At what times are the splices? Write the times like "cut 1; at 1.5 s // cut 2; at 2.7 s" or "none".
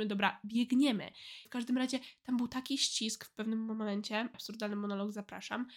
cut 1; at 1.5 s // cut 2; at 4.3 s

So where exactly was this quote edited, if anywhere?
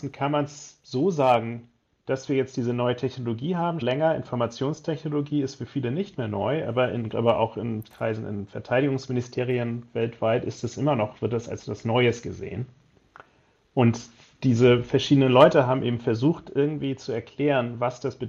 cut 1; at 3.8 s // cut 2; at 7.1 s

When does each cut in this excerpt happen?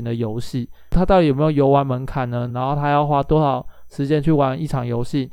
cut 1; at 2.5 s

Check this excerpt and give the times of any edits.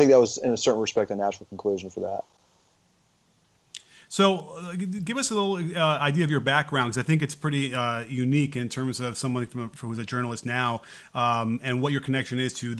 none

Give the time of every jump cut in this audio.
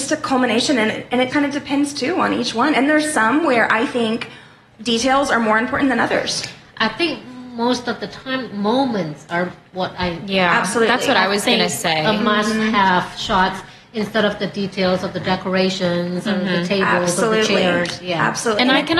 cut 1; at 1.3 s

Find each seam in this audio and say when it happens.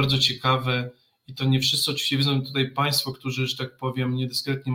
none

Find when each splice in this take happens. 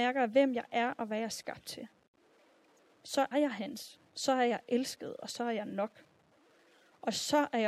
cut 1; at 3.3 s

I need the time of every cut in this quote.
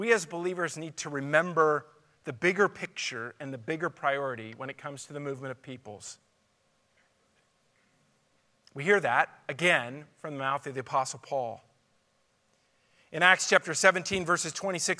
none

